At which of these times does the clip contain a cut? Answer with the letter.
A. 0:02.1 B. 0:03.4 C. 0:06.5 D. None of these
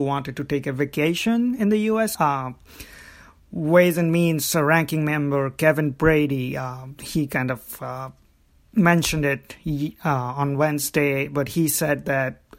A